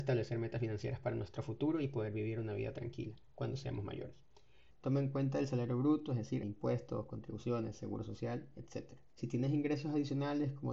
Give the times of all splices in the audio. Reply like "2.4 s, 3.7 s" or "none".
4.7 s, 6.4 s, 9.1 s